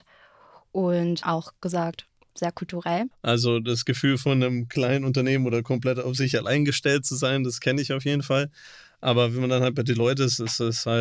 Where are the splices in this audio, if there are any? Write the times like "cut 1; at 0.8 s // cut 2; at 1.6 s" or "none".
cut 1; at 3.1 s